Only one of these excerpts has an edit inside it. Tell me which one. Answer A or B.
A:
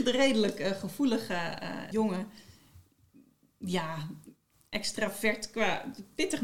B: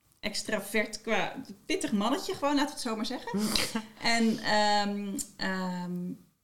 A